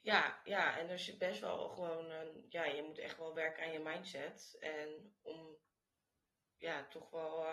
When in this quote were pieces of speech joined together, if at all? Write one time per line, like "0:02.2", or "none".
none